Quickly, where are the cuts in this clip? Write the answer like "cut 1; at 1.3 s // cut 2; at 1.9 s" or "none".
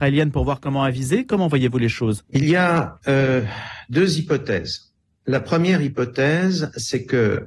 cut 1; at 2.2 s